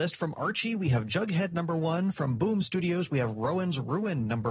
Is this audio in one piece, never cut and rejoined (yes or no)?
yes